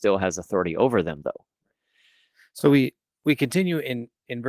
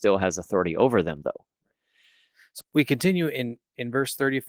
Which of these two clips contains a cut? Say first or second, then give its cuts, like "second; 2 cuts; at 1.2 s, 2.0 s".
second; 1 cut; at 2.6 s